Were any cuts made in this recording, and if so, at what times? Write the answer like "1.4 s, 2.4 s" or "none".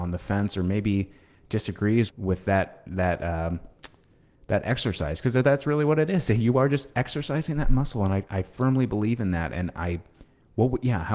2.1 s